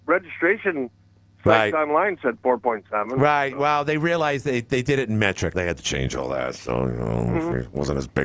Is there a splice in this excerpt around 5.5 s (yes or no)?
yes